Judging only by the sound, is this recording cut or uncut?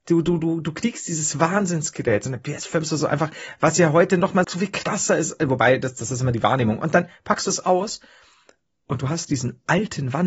cut